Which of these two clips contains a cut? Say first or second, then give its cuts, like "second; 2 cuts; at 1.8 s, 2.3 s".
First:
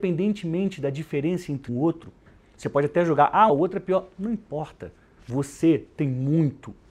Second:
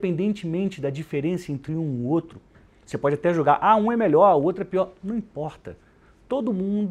first; 3 cuts; at 1.7 s, 3.5 s, 5.2 s